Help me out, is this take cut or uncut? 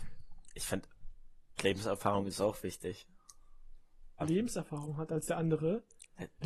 cut